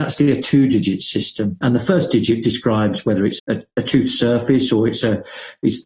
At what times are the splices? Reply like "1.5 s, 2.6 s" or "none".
1.6 s, 3.4 s